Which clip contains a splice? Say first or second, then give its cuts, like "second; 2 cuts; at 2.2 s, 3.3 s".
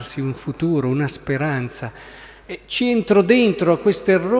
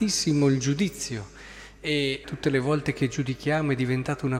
second; 1 cut; at 2.2 s